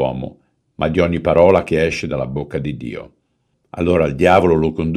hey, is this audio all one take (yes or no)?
yes